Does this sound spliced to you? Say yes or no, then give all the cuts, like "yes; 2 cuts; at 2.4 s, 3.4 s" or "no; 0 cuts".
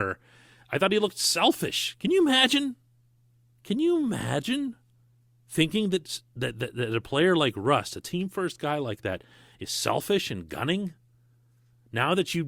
no; 0 cuts